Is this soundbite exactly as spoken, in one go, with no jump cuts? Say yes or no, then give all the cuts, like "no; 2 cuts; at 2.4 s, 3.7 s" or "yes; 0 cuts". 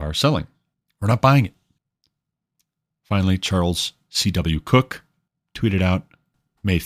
yes; 0 cuts